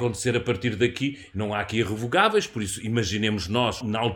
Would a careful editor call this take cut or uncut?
cut